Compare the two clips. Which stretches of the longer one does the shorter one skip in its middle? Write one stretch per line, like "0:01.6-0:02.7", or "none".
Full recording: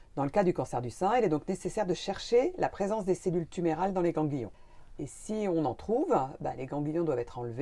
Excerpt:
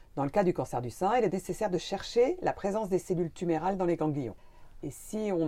0:01.3-0:01.5

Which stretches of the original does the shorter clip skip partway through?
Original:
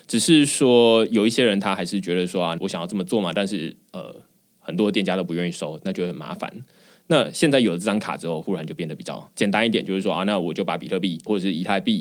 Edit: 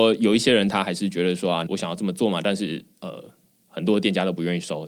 none

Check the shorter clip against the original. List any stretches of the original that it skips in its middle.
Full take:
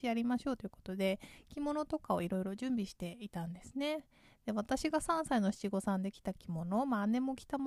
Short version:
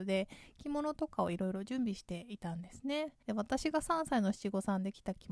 0:04.1-0:04.4

